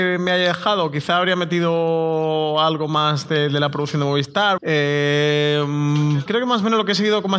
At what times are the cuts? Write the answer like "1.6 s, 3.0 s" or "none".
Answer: 4.6 s, 6.3 s